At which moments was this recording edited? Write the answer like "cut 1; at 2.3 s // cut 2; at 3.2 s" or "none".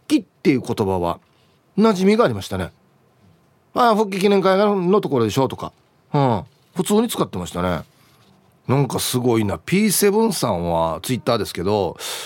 cut 1; at 8.6 s